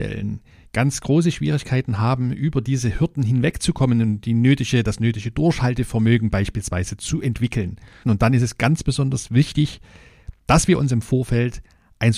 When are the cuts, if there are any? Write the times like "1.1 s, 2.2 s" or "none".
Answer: 8.0 s